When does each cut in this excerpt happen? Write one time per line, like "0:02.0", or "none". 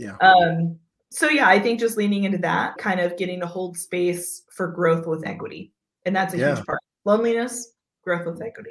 0:02.8
0:06.9